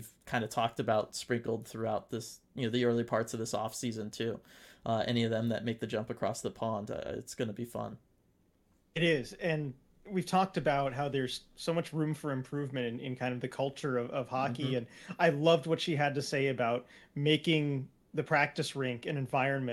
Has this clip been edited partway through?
no; 0 cuts

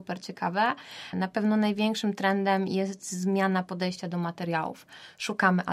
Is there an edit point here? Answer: yes; 1 cut; at 1.1 s

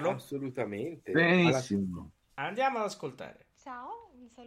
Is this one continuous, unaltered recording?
no; 1 cut; at 3.5 s

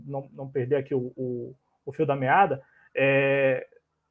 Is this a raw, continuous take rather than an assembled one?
yes; 0 cuts

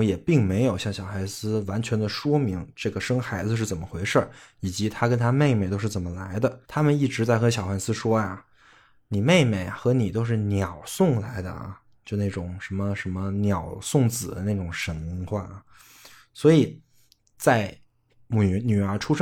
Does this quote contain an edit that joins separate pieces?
yes; 1 cut; at 6.6 s

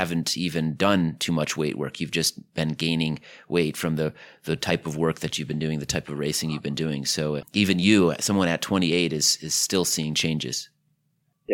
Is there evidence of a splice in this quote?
yes; 1 cut; at 7.4 s

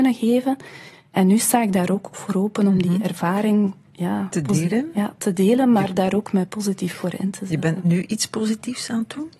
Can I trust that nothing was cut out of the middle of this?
yes; 0 cuts

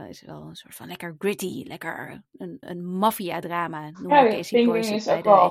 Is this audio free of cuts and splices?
no; 1 cut; at 2.6 s

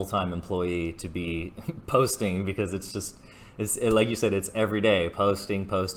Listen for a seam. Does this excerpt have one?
no; 0 cuts

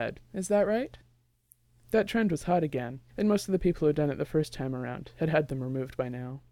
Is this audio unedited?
no; 2 cuts; at 1.8 s, 3.1 s

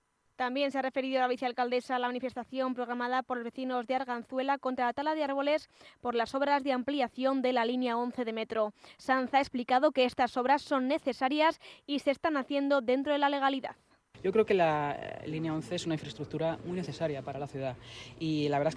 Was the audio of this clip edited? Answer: no; 0 cuts

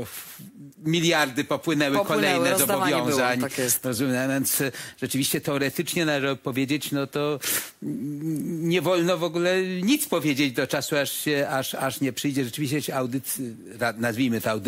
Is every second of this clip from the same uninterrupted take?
yes; 0 cuts

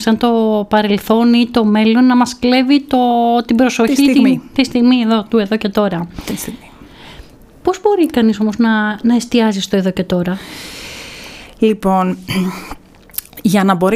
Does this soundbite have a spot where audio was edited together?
no; 0 cuts

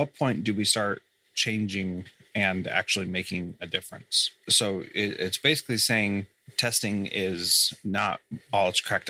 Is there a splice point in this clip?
yes; 1 cut; at 4.4 s

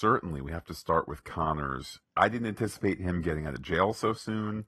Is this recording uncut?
no; 1 cut; at 2.0 s

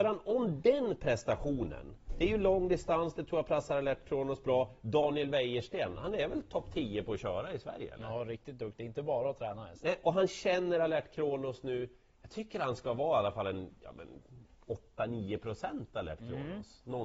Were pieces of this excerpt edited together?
no; 0 cuts

